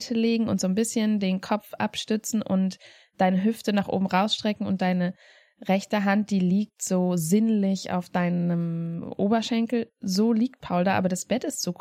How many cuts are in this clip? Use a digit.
0